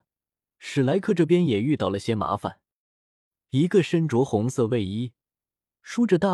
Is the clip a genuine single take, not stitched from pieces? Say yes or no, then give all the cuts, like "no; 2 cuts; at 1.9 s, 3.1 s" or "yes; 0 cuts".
yes; 0 cuts